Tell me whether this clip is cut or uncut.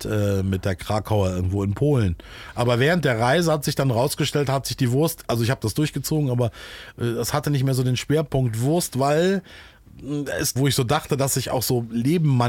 cut